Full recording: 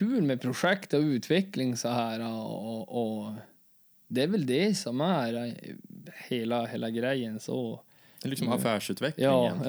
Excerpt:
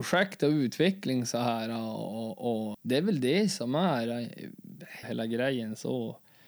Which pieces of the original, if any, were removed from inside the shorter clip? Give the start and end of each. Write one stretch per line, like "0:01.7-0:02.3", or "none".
0:03.2-0:04.0
0:06.3-0:06.7